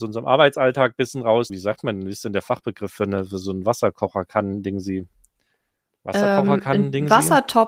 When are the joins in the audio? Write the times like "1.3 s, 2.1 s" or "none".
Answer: 1.5 s